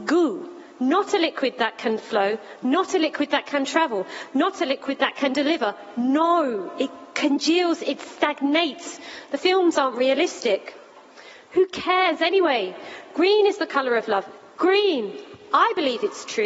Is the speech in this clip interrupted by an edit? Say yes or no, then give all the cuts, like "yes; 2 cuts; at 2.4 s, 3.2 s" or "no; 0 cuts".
no; 0 cuts